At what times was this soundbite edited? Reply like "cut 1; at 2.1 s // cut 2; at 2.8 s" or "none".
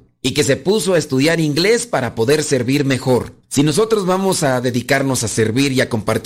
cut 1; at 3.4 s